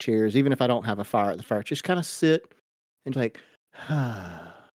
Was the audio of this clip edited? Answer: yes; 1 cut; at 3.1 s

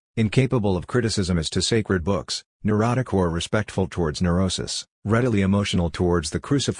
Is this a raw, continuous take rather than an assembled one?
yes; 0 cuts

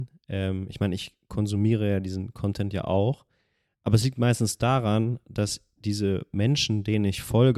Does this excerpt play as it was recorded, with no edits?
yes; 0 cuts

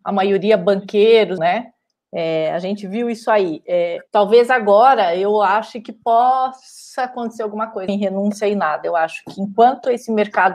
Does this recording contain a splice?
yes; 3 cuts; at 1.4 s, 4.1 s, 7.9 s

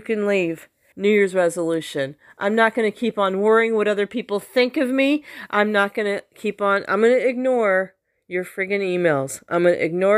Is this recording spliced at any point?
yes; 1 cut; at 0.9 s

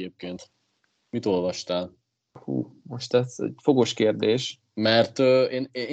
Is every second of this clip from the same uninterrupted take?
yes; 0 cuts

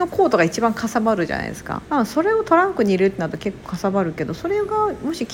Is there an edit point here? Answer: yes; 1 cut; at 1.8 s

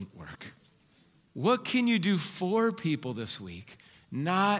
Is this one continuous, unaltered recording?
no; 1 cut; at 1.3 s

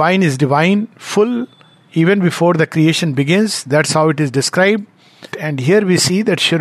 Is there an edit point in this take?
yes; 1 cut; at 5.3 s

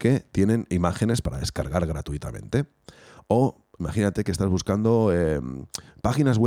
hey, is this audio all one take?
yes; 0 cuts

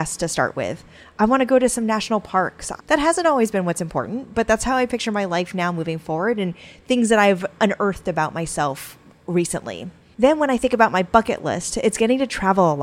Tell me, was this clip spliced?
yes; 1 cut; at 2.8 s

